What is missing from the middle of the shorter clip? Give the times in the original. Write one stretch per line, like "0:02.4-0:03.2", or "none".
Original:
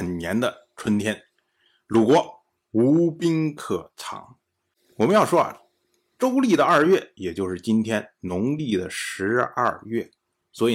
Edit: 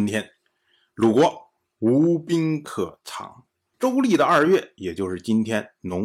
0:04.7-0:06.1